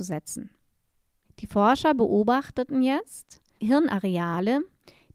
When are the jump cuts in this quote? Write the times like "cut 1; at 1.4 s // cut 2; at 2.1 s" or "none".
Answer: cut 1; at 1.2 s // cut 2; at 3.6 s